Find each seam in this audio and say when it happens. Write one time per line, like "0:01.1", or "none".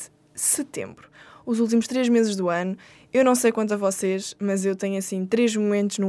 none